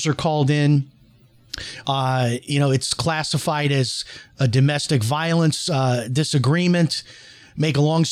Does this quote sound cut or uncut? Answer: uncut